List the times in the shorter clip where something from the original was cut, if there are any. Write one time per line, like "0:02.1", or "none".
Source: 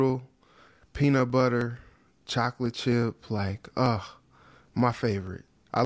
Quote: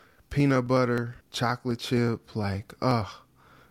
0:01.2